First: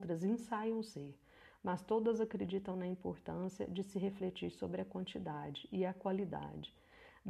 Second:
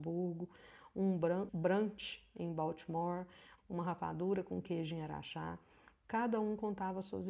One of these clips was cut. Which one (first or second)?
second